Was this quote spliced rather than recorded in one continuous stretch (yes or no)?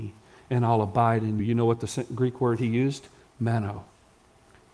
yes